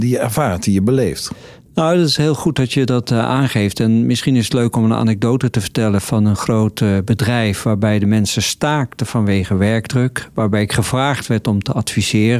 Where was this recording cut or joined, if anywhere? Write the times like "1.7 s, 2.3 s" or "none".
none